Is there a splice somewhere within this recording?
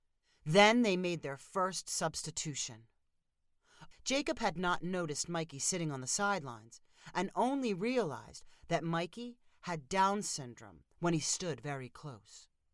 yes; 1 cut; at 3.9 s

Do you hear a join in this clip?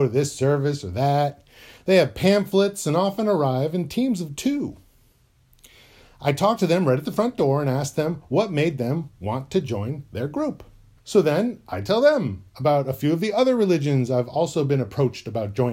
yes; 1 cut; at 11.0 s

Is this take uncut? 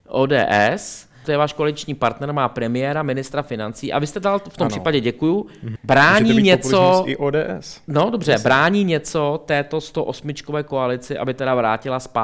no; 2 cuts; at 1.2 s, 5.8 s

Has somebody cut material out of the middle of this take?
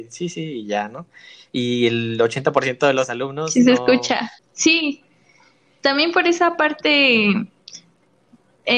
yes; 1 cut; at 4.4 s

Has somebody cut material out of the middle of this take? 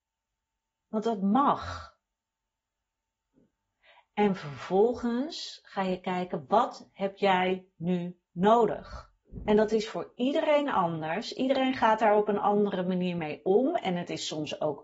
no; 0 cuts

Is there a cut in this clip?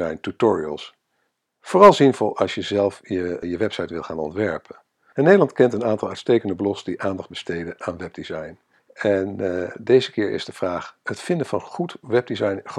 yes; 3 cuts; at 3.4 s, 5.1 s, 8.8 s

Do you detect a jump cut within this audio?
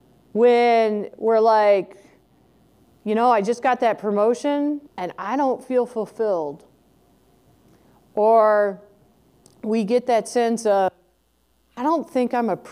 yes; 1 cut; at 4.9 s

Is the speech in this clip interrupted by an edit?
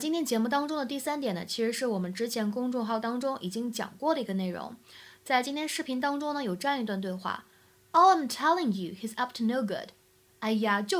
no; 0 cuts

